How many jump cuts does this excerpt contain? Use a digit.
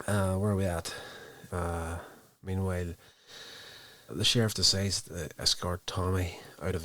2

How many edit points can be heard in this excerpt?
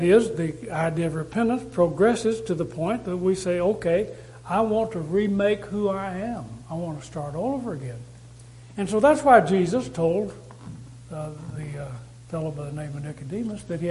0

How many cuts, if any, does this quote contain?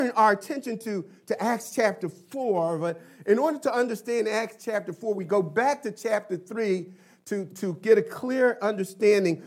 1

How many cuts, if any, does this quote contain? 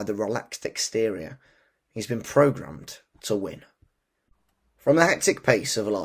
0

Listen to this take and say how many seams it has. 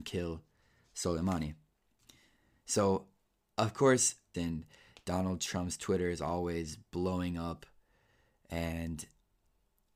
1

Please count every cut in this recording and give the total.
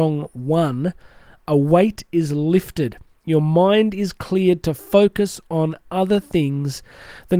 0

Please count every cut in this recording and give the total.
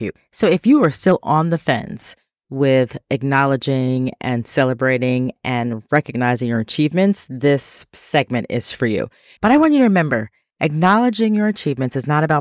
1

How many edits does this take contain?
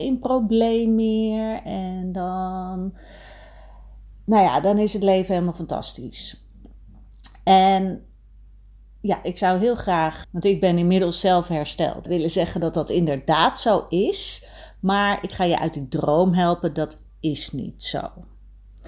2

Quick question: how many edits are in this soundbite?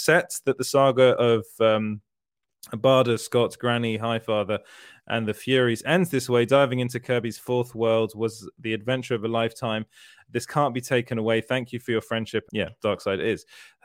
1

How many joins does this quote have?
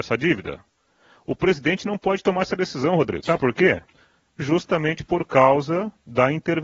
1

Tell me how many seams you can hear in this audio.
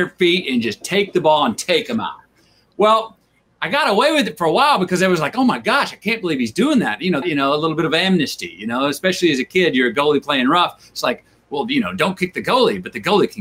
1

